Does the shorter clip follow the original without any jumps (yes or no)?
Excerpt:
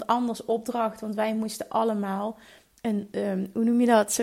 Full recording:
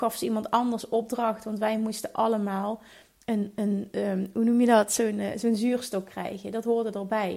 no